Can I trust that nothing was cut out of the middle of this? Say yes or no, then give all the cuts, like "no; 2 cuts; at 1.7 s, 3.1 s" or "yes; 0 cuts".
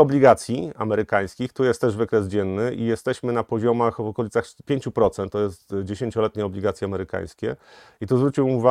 yes; 0 cuts